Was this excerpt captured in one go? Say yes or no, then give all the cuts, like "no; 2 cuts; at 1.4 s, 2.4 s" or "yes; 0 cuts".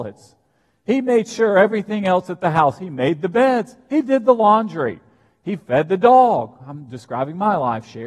yes; 0 cuts